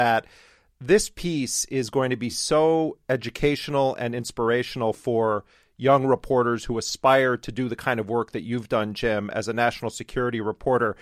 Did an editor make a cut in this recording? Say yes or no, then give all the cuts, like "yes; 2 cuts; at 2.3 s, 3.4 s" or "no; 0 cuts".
no; 0 cuts